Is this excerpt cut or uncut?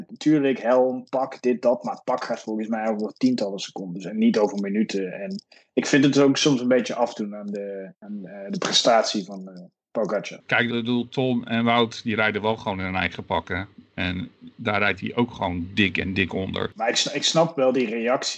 cut